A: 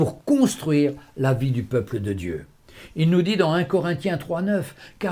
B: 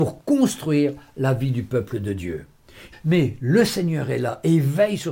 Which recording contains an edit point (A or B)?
B